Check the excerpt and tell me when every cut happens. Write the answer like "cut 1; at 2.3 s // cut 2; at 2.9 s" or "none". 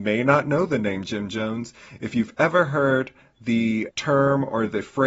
cut 1; at 3.9 s